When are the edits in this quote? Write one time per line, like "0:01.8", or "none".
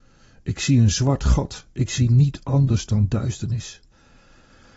none